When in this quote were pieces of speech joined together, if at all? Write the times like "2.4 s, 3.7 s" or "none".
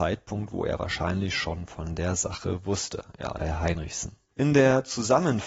3.4 s